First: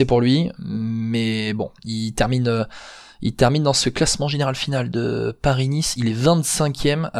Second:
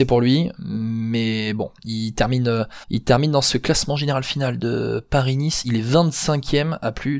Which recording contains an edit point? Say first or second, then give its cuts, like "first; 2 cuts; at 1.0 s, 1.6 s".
second; 1 cut; at 2.8 s